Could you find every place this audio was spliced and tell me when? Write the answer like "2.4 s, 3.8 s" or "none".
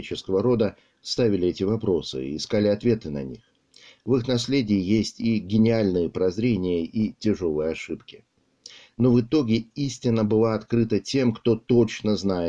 none